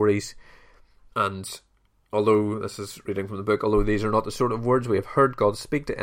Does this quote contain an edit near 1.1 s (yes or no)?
yes